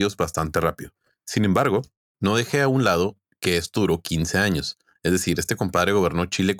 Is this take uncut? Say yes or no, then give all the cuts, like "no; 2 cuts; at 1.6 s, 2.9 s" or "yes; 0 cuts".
yes; 0 cuts